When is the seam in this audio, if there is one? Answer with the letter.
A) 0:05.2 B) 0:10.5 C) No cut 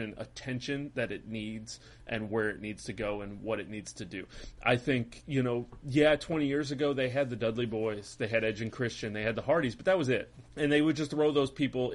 B